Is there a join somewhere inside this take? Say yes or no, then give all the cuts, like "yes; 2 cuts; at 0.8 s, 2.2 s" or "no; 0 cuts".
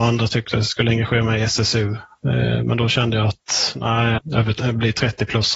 yes; 1 cut; at 4.2 s